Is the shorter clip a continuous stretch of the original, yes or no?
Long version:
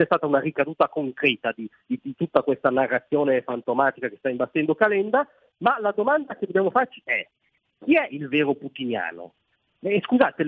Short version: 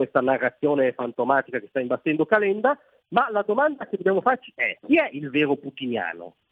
no